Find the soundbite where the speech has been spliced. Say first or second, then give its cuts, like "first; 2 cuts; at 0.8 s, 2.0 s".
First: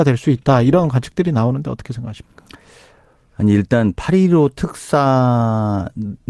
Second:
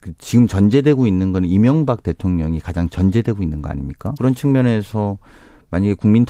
second; 1 cut; at 4.2 s